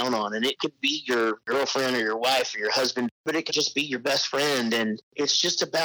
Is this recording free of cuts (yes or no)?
no